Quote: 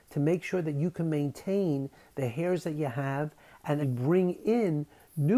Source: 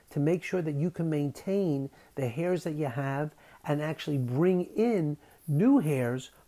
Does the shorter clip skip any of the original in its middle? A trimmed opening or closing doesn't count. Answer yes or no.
yes